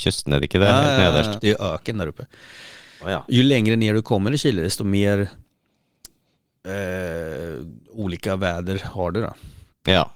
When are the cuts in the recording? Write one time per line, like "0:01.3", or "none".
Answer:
0:01.4